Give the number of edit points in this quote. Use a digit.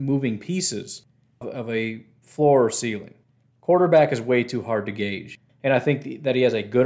2